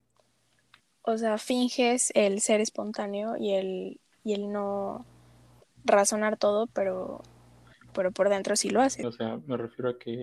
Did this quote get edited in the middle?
yes; 1 cut; at 9.0 s

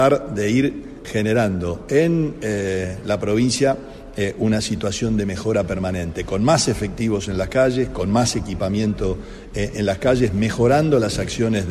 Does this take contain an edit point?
yes; 1 cut; at 1.0 s

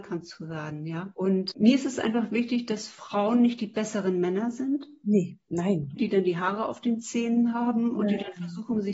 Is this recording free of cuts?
no; 1 cut; at 6.0 s

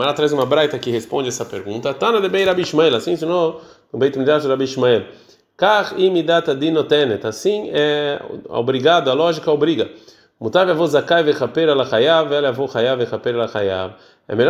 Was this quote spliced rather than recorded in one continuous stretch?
no; 0 cuts

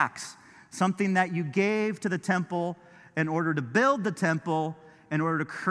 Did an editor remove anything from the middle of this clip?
no; 0 cuts

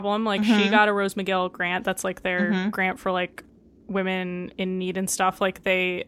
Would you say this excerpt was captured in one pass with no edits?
yes; 0 cuts

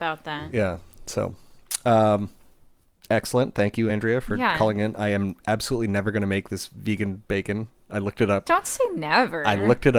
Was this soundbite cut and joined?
no; 0 cuts

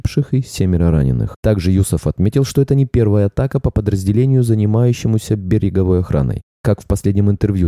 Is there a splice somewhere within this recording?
no; 0 cuts

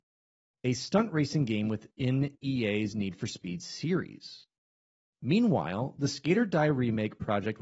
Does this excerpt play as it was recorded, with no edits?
yes; 0 cuts

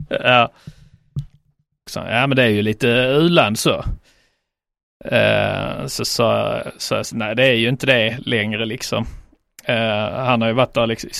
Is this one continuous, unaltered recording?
no; 1 cut; at 1.9 s

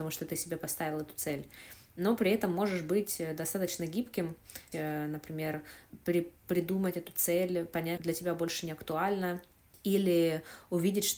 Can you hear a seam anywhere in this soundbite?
yes; 2 cuts; at 4.7 s, 8.0 s

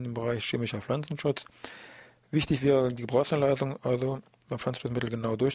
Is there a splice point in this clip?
no; 0 cuts

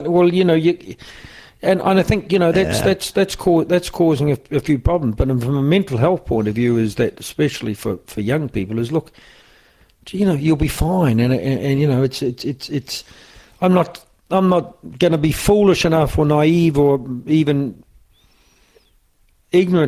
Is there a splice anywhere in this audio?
no; 0 cuts

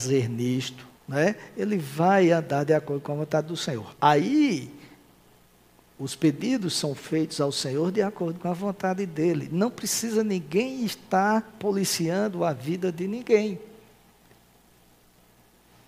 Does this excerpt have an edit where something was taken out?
yes; 1 cut; at 1.0 s

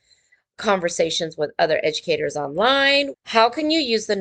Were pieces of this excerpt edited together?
yes; 1 cut; at 3.1 s

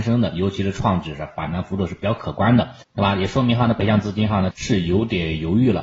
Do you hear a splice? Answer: yes; 2 cuts; at 2.8 s, 4.5 s

